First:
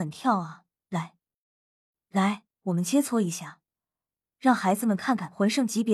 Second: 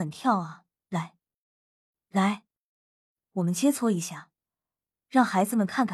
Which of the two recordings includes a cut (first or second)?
first